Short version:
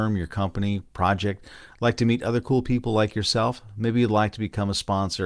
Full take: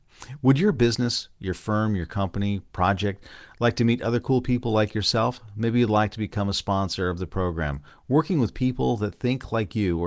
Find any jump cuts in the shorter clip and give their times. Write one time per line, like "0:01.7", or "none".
none